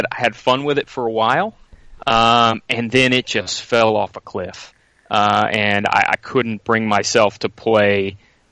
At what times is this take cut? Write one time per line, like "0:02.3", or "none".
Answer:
none